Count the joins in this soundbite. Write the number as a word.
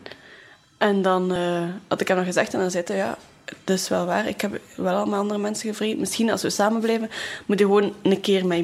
zero